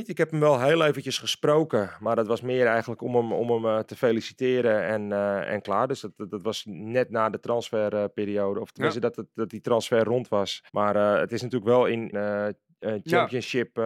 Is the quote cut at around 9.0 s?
no; 2 cuts; at 10.7 s, 12.1 s

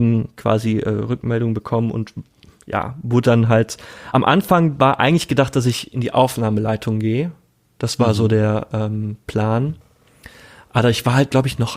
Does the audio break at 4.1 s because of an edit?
no; 0 cuts

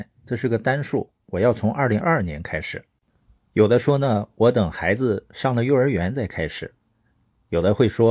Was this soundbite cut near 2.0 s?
yes; 1 cut; at 2.0 s

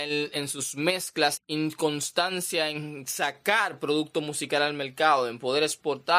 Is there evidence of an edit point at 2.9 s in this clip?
no; 1 cut; at 1.4 s

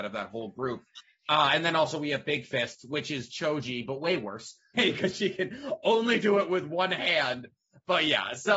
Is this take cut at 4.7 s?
yes; 2 cuts; at 3.3 s, 4.7 s

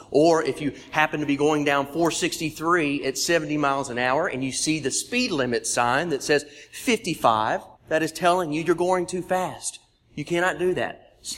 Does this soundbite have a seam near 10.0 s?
no; 1 cut; at 7.8 s

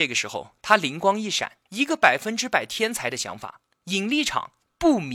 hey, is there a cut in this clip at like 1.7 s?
yes; 1 cut; at 1.7 s

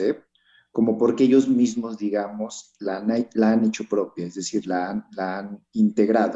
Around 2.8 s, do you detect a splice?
no; 0 cuts

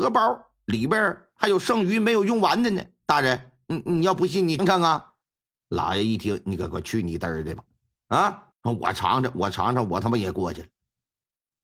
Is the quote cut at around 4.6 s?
yes; 2 cuts; at 4.6 s, 8.5 s

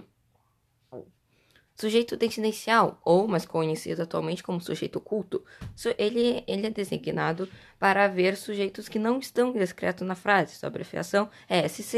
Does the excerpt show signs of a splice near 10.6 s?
no; 0 cuts

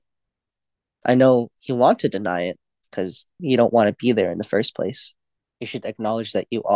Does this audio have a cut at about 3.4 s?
yes; 2 cuts; at 3.4 s, 5.5 s

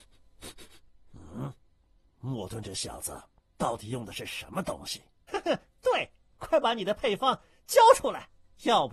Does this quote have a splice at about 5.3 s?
yes; 1 cut; at 5.3 s

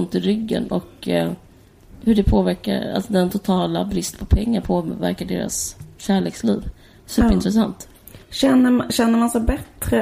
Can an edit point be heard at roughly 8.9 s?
no; 0 cuts

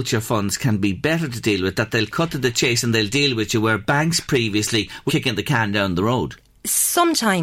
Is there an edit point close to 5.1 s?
yes; 1 cut; at 5.1 s

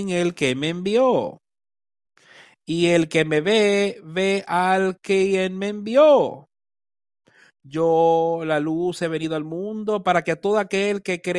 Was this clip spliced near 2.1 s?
no; 0 cuts

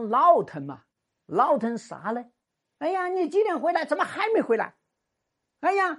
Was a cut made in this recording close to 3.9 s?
no; 0 cuts

